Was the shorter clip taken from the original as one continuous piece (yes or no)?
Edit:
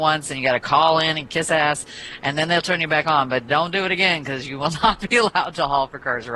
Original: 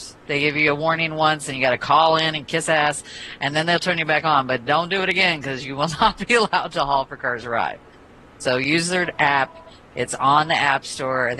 yes